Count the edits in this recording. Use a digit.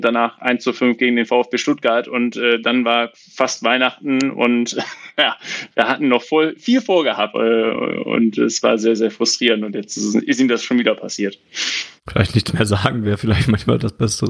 2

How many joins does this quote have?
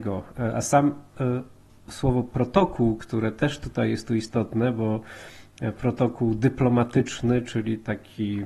0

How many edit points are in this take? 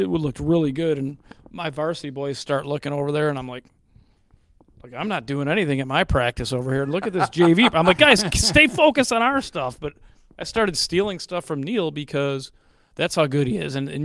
0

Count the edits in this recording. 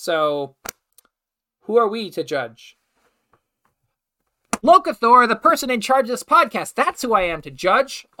0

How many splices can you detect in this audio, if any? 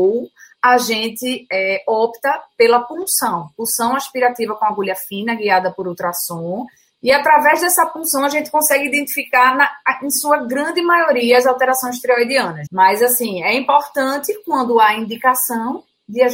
2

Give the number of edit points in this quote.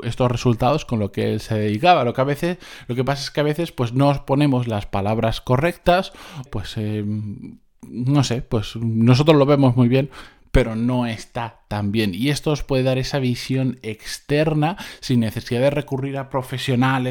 1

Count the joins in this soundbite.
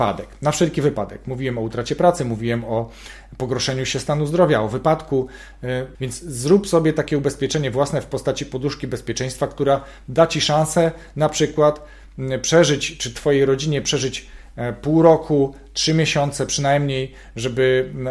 1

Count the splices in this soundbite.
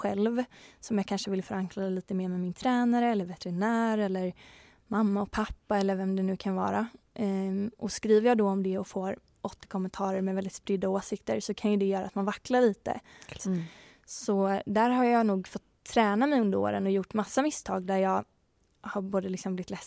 1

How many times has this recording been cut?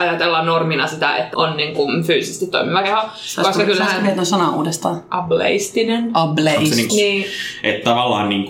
2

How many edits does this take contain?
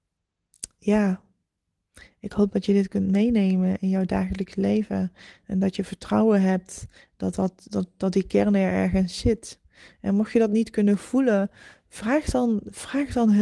0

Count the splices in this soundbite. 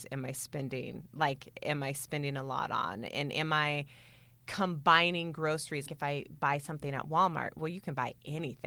1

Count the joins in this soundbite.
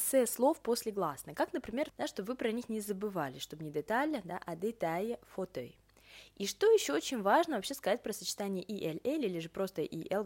1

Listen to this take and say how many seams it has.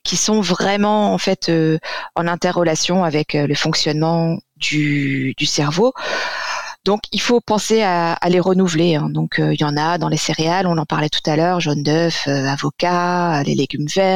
0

